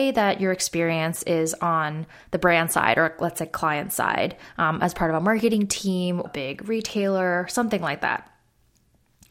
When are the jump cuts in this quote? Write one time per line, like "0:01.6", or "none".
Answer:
0:06.3